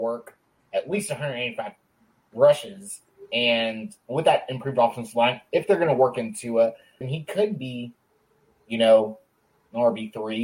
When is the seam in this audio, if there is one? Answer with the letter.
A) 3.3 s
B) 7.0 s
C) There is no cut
B